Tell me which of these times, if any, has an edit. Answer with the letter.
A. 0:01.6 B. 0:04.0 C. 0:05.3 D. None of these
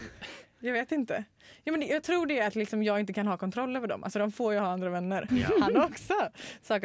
C